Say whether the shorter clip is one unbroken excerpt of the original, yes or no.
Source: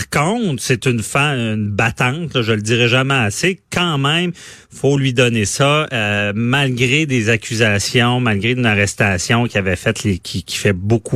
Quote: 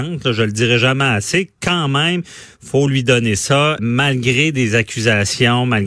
no